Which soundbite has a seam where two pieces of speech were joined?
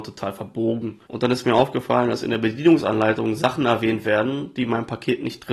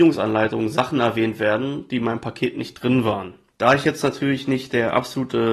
first; 1 cut; at 1.1 s

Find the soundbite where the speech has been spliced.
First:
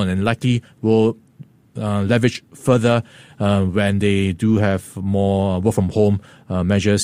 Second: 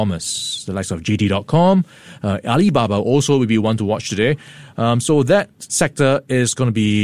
second; 1 cut; at 5.5 s

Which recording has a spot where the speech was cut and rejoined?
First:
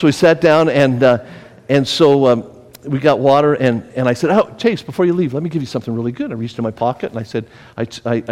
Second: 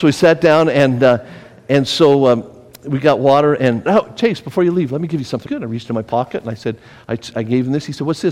second; 3 cuts; at 3.9 s, 5.5 s, 7.3 s

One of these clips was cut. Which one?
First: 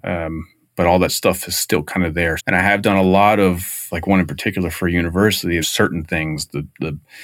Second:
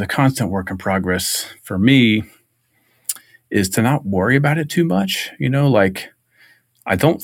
first; 3 cuts; at 2.4 s, 3.9 s, 5.6 s

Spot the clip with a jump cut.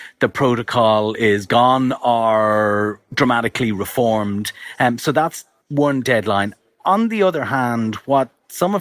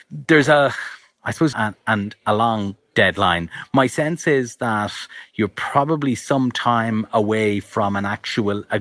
second; 1 cut; at 1.5 s

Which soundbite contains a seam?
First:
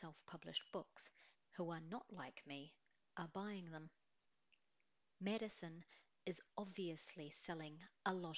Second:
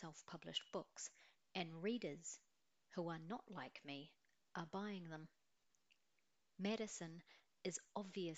first; 1 cut; at 1.4 s

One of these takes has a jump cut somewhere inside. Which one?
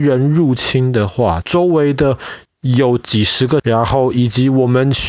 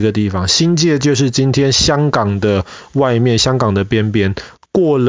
first; 2 cuts; at 1.4 s, 3.6 s

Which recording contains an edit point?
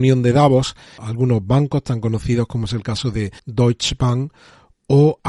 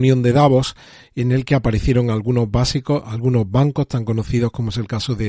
first; 2 cuts; at 1.0 s, 3.4 s

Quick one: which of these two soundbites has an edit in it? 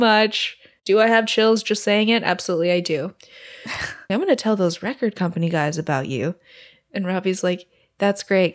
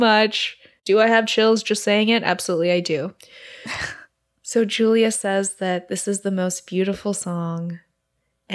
first; 1 cut; at 4.1 s

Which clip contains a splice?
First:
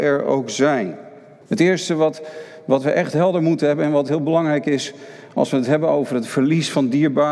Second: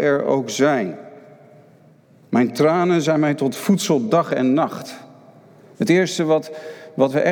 first; 1 cut; at 1.4 s

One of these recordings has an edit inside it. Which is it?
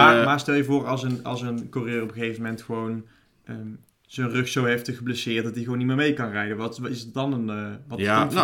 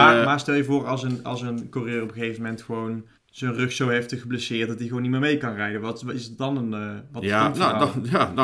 second; 1 cut; at 3.2 s

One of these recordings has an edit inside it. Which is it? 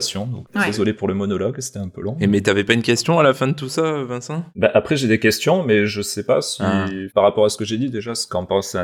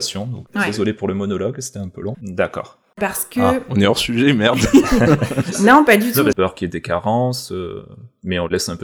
second; 2 cuts; at 2.1 s, 6.3 s

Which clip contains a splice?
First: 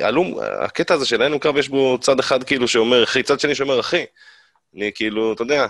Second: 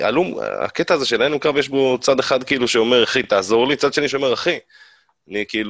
first; 1 cut; at 3.2 s

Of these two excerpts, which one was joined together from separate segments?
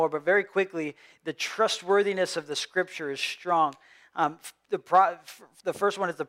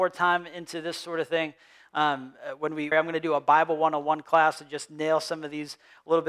second; 1 cut; at 2.9 s

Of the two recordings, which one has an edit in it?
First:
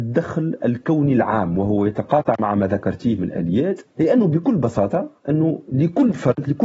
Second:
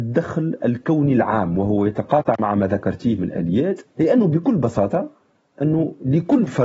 first; 1 cut; at 5.2 s

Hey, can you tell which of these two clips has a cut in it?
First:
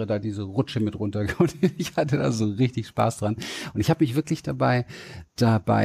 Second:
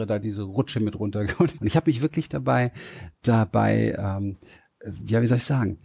second; 1 cut; at 1.6 s

